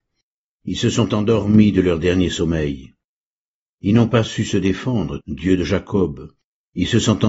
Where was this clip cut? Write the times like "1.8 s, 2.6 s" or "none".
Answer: 5.2 s